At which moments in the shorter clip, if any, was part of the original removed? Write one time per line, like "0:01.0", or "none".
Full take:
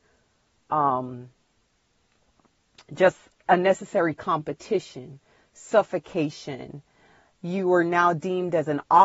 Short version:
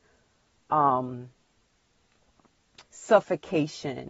0:02.8